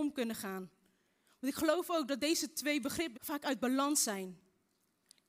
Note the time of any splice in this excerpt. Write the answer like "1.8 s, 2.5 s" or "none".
3.1 s